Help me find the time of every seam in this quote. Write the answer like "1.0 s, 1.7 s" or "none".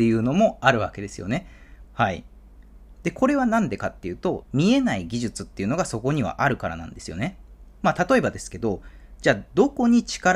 1.8 s, 2.9 s, 4.4 s